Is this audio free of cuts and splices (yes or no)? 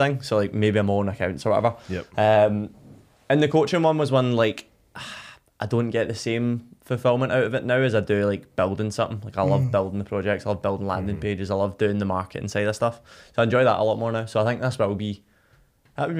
yes